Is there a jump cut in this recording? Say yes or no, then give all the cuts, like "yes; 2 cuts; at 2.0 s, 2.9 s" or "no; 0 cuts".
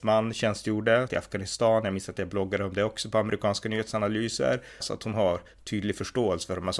yes; 2 cuts; at 1.1 s, 4.8 s